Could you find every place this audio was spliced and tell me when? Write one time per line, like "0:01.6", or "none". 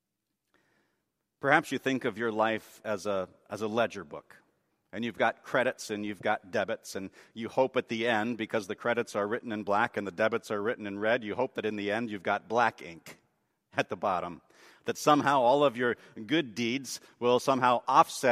none